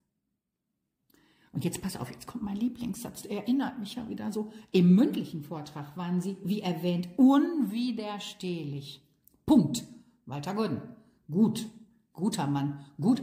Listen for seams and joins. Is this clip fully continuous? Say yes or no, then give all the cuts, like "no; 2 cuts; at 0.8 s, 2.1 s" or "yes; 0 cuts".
yes; 0 cuts